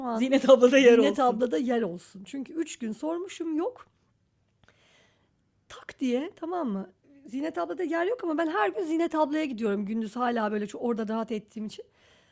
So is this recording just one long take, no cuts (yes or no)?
yes